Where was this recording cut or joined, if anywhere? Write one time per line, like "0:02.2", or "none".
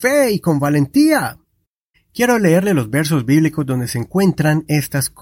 0:01.9